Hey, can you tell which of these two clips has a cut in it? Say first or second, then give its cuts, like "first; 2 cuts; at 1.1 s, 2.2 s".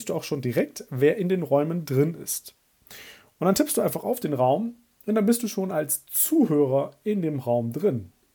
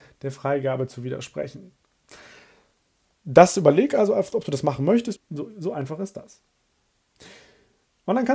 second; 1 cut; at 5.2 s